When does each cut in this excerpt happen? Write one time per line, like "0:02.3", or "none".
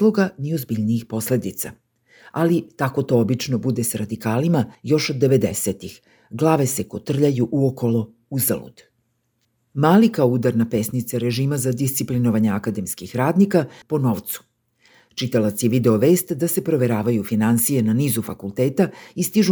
0:04.7
0:13.8